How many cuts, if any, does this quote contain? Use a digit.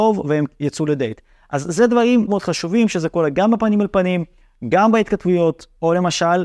1